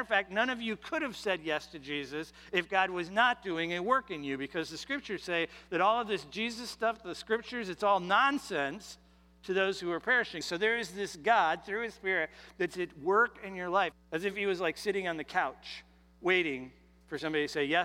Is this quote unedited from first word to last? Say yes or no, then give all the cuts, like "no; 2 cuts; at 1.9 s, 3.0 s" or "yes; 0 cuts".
no; 2 cuts; at 10.4 s, 13.9 s